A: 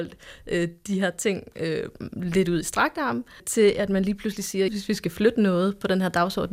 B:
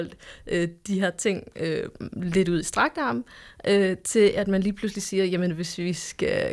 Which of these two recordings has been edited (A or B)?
A